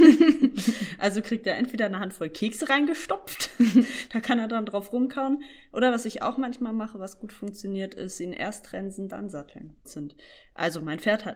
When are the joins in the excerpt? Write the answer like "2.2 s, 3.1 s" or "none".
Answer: 9.9 s